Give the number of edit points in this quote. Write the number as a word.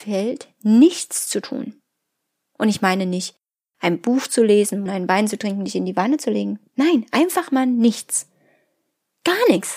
one